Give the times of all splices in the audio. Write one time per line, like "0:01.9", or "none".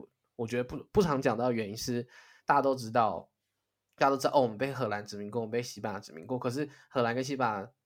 none